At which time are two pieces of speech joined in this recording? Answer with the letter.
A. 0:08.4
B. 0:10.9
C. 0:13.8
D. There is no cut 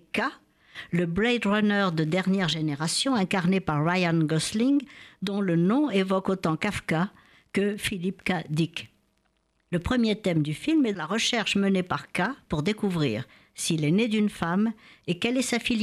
B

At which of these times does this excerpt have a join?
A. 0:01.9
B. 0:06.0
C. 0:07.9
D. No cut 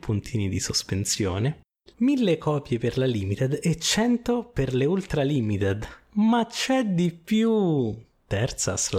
A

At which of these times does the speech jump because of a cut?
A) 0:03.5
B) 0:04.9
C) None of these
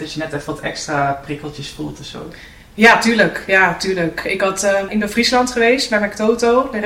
B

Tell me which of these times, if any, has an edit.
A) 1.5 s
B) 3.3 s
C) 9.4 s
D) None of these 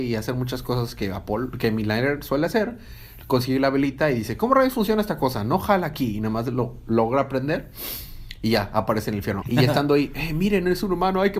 C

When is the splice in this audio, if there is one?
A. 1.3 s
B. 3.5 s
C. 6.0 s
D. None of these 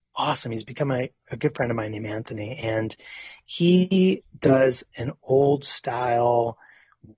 D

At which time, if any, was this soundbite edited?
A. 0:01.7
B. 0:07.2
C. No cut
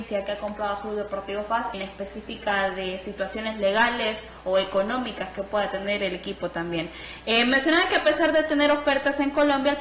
A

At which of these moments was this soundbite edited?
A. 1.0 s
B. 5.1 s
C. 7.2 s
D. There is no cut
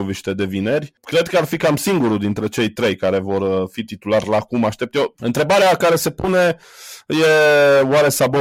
B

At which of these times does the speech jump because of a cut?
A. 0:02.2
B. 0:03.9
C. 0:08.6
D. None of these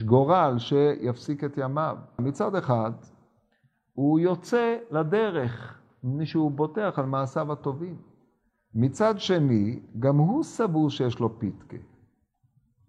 A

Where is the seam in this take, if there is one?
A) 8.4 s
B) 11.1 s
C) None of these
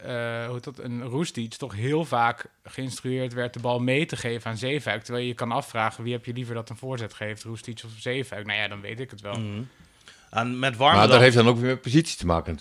C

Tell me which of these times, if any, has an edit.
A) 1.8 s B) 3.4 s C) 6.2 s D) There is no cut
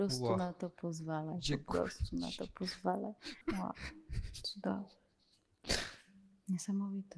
B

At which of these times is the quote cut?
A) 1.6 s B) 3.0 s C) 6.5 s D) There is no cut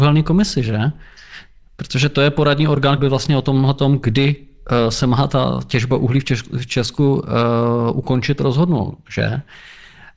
B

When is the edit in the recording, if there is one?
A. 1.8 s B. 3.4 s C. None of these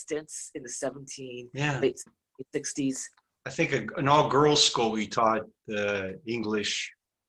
C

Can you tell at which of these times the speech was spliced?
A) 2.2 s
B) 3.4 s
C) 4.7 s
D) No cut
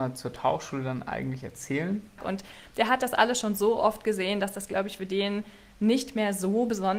A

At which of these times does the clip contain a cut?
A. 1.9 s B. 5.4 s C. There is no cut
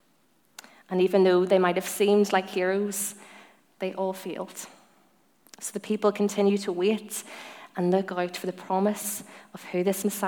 B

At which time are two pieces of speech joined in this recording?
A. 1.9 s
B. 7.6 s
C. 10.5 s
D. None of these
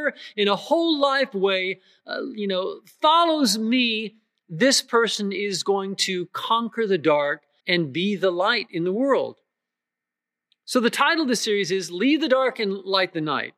B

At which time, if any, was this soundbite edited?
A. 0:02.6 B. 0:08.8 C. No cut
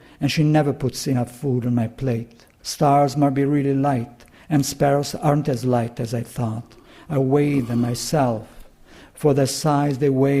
A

